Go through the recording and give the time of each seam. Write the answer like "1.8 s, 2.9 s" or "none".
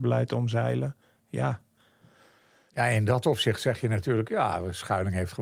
none